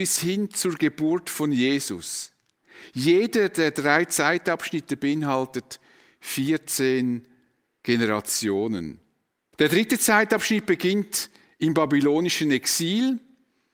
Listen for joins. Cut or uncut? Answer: cut